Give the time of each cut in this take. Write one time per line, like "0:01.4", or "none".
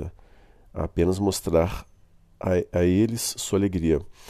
none